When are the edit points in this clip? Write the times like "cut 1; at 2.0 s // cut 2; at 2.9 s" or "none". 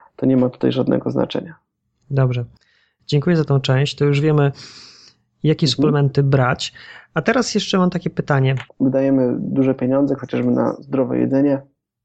cut 1; at 8.7 s // cut 2; at 10.2 s